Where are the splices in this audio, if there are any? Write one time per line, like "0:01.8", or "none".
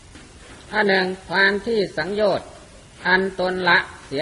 none